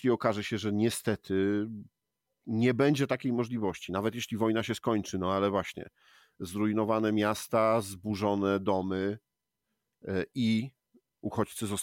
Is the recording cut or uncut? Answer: uncut